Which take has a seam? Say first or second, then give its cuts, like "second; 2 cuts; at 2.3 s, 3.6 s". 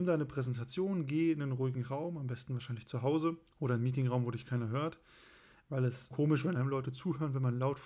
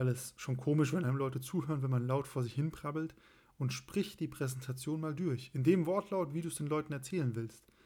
first; 1 cut; at 6.1 s